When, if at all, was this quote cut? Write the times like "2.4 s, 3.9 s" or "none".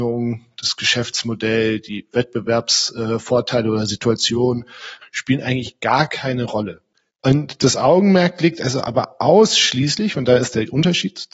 5.0 s, 7.1 s

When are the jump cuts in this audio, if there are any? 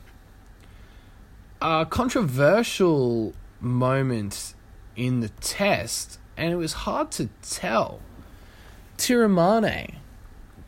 none

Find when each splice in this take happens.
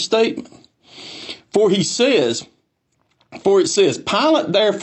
none

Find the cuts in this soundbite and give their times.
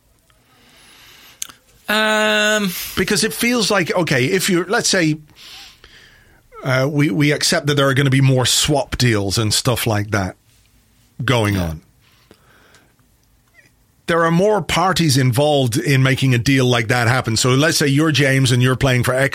none

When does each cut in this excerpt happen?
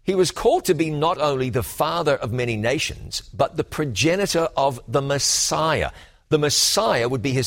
none

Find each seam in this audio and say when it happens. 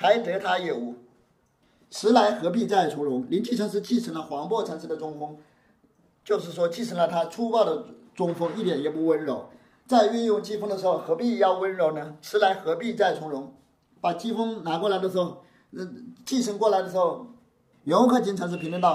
17.7 s

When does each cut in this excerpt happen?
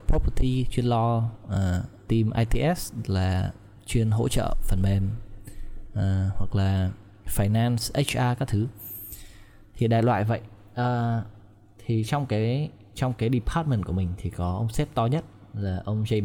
2.0 s

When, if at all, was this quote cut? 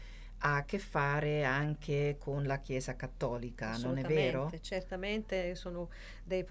none

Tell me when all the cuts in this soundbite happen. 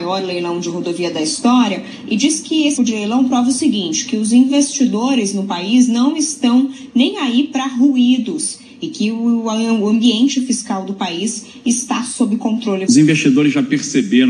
2.8 s, 12.9 s

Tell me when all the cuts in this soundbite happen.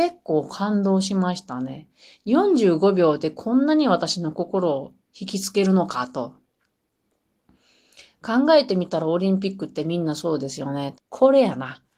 10.9 s

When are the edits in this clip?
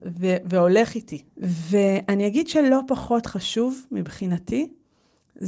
1.3 s

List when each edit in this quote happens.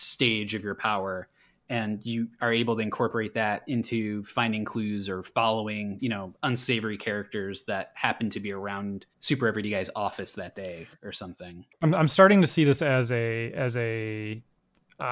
6.3 s, 9.1 s

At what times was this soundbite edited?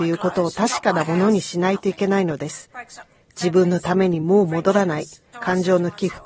5.3 s

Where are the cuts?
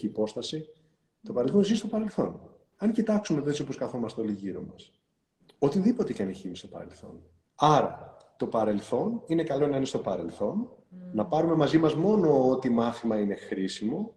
2.7 s, 7.4 s

